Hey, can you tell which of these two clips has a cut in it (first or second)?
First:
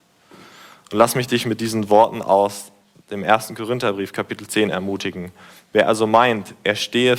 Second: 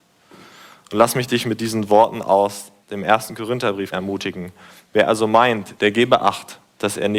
second